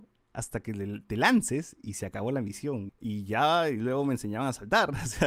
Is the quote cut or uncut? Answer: cut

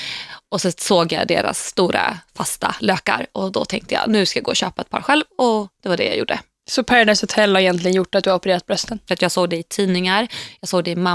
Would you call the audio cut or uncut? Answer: cut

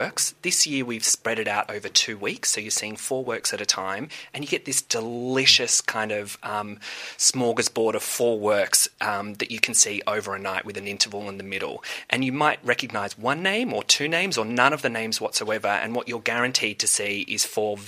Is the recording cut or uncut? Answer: uncut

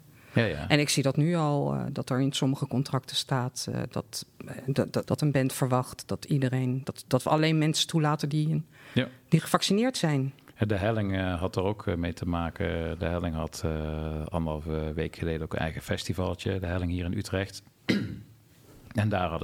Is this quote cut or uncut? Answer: cut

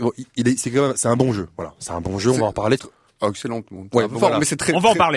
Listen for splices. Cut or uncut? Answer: cut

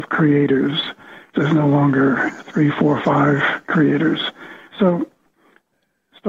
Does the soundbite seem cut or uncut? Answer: cut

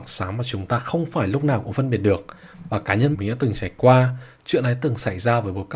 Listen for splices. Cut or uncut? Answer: cut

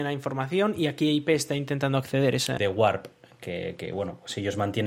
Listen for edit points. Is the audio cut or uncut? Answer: cut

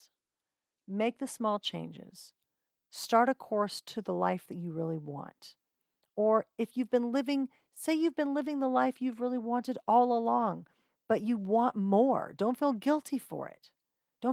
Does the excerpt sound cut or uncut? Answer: uncut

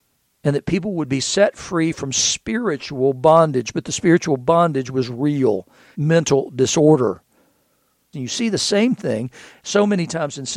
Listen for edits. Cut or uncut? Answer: cut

